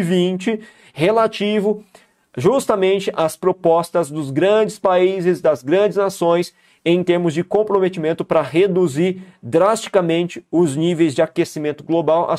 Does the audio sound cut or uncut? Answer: uncut